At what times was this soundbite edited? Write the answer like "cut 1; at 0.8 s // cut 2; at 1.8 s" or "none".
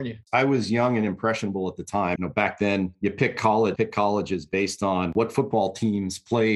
cut 1; at 2.2 s // cut 2; at 3.8 s